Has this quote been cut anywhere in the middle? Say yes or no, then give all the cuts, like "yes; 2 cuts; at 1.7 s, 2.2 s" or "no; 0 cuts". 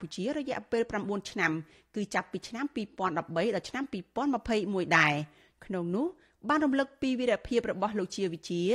no; 0 cuts